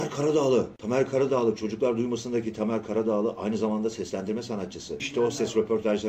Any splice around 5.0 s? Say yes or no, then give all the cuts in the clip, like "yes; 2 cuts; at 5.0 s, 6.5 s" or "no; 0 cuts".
no; 0 cuts